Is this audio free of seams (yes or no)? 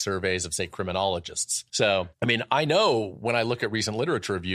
no